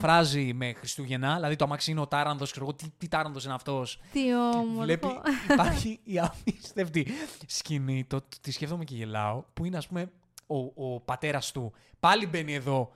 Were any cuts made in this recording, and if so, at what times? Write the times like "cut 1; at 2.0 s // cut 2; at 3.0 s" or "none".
none